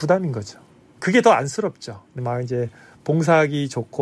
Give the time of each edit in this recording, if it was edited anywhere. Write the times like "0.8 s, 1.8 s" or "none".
1.0 s, 2.2 s